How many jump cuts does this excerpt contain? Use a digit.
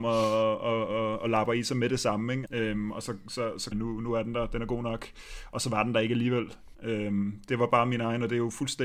3